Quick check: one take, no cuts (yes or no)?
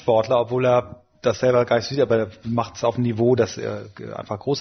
yes